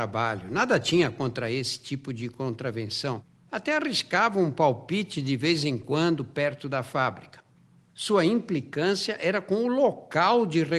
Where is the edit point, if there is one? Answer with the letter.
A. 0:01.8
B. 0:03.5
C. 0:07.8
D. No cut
D